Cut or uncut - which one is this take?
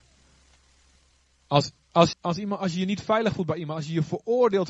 cut